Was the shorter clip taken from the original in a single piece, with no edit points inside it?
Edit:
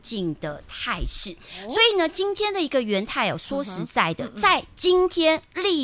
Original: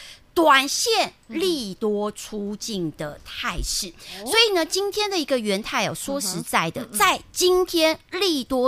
yes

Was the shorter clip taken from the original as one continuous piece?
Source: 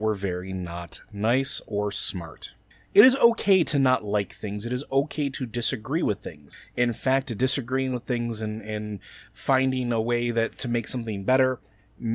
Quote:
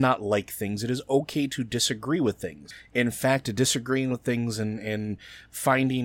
yes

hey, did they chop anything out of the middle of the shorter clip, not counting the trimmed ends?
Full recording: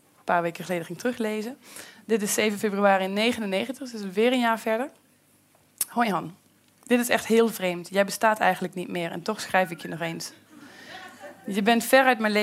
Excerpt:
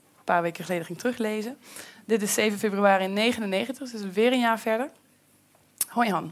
no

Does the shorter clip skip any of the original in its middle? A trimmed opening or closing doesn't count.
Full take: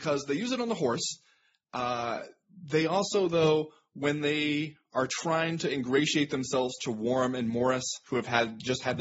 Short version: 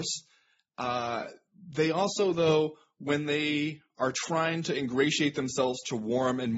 no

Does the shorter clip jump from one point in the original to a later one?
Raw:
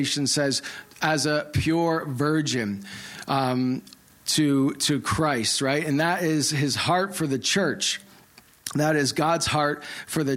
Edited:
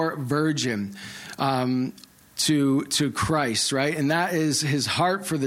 no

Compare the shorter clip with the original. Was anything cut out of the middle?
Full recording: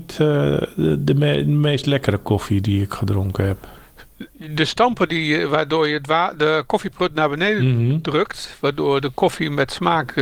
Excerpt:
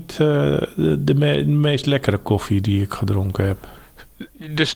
no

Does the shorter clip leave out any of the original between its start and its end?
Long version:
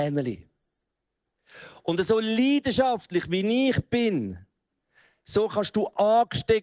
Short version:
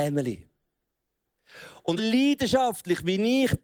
yes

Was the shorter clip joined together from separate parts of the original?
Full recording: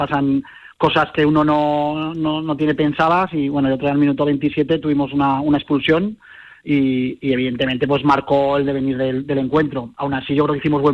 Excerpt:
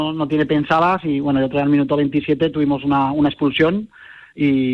no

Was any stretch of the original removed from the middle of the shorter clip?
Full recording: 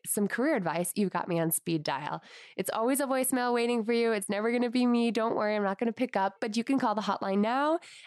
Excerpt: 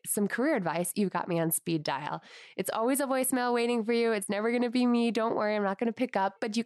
no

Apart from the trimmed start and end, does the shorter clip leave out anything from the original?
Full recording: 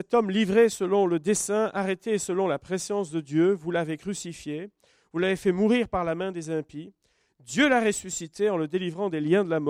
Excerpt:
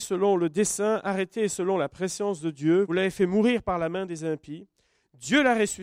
yes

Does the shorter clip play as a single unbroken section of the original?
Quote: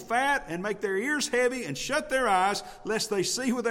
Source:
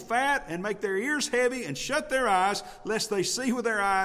yes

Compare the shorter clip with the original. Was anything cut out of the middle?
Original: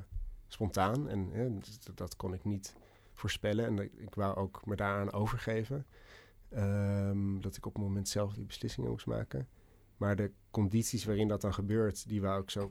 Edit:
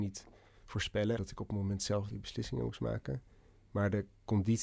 yes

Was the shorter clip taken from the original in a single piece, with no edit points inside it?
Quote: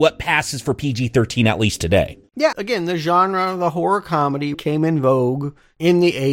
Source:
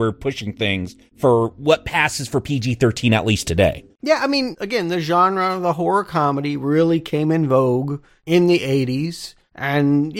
no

